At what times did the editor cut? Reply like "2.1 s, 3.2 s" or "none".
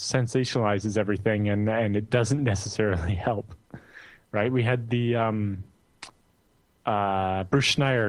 3.6 s